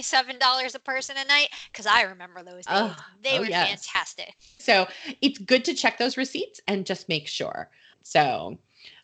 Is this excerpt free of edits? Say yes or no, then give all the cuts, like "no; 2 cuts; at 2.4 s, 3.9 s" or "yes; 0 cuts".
no; 2 cuts; at 4.6 s, 7.9 s